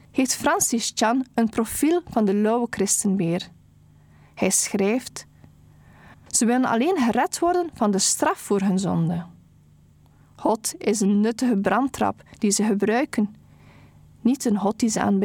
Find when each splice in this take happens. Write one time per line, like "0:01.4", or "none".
0:06.1

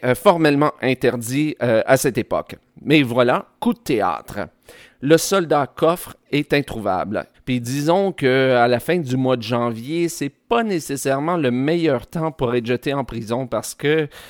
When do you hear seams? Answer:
0:07.3

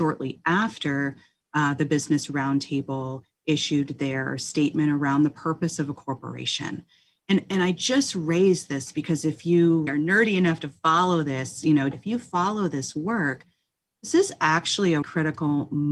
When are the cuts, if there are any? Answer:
0:09.9
0:11.9
0:15.0

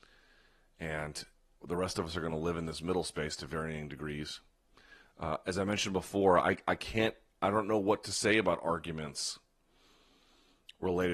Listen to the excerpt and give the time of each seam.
none

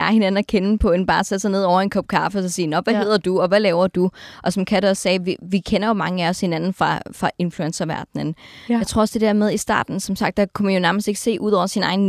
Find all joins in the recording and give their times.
0:08.7

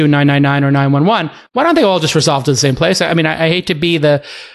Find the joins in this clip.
none

